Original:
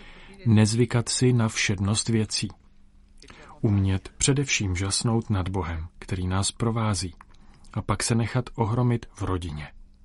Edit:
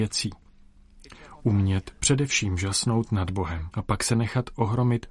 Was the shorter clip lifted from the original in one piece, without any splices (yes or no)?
no